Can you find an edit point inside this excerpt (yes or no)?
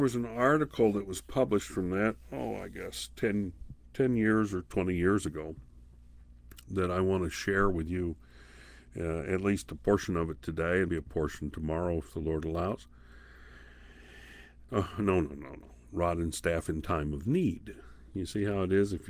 yes